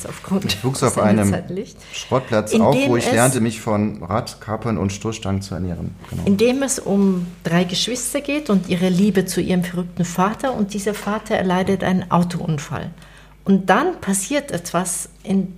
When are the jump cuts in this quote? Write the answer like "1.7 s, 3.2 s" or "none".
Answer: none